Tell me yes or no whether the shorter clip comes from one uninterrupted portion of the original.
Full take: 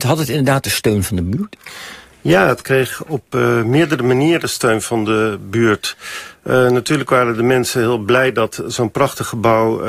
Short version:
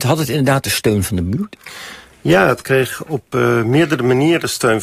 yes